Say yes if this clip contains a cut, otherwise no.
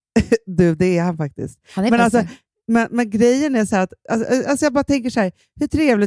no